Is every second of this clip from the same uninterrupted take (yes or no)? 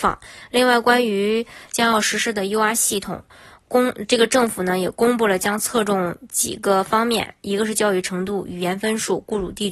yes